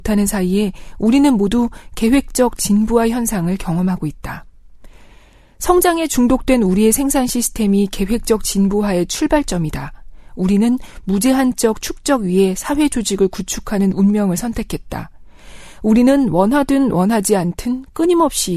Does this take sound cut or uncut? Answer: uncut